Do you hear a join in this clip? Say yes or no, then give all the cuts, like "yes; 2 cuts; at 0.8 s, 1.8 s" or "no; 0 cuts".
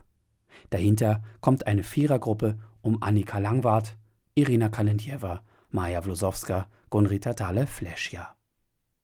no; 0 cuts